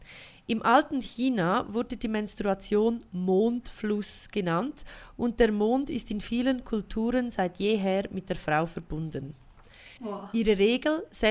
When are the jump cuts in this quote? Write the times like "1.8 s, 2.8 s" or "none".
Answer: 10.0 s